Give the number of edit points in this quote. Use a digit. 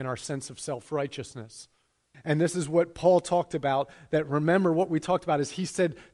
1